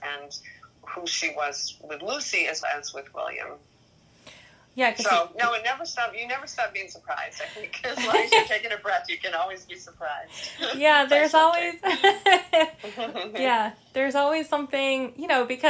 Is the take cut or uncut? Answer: cut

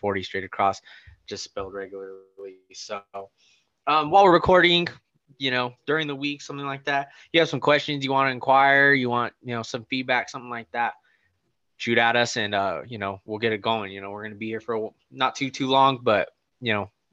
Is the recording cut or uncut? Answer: uncut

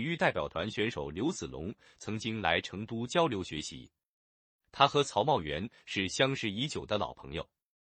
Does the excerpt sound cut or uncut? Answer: uncut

